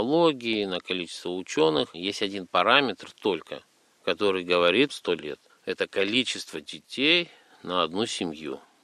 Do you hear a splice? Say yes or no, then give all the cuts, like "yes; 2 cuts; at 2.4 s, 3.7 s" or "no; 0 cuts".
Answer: yes; 2 cuts; at 1.9 s, 4.9 s